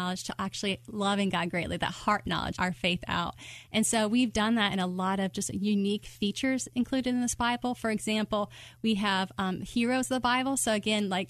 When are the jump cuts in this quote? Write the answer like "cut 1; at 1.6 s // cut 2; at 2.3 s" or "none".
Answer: cut 1; at 2.5 s